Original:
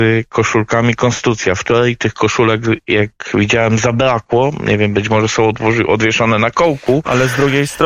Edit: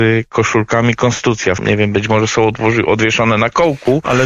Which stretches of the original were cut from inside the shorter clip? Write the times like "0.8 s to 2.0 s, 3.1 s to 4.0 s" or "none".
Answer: 1.6 s to 4.6 s